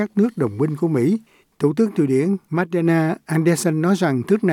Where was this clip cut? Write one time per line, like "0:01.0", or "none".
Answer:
0:01.4